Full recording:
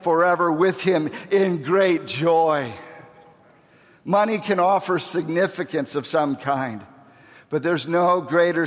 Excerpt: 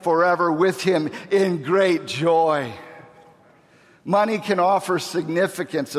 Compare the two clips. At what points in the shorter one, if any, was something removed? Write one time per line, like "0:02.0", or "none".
none